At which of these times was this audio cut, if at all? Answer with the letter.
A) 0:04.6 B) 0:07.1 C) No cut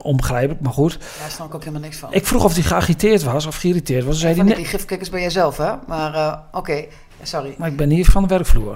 A